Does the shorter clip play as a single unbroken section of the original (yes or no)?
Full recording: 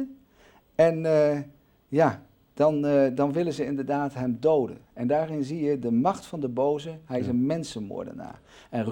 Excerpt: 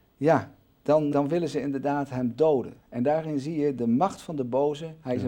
no